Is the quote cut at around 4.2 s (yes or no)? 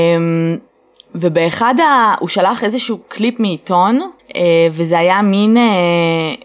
yes